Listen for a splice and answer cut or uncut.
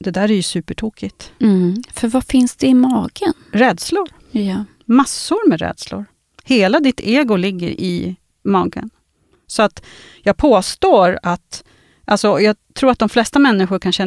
uncut